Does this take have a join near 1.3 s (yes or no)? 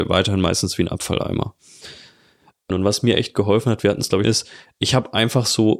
no